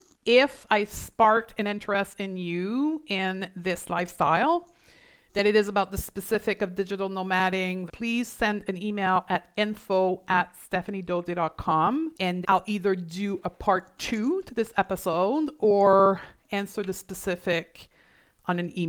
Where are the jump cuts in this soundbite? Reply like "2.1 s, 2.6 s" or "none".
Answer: 7.9 s, 12.4 s